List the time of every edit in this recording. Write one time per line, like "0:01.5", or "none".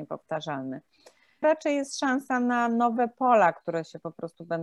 0:01.4